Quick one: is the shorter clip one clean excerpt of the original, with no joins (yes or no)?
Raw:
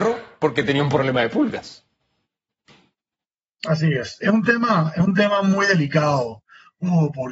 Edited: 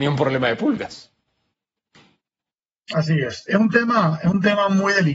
yes